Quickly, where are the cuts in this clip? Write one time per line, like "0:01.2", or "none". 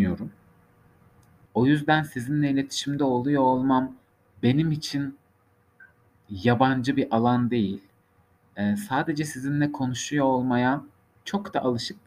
0:01.5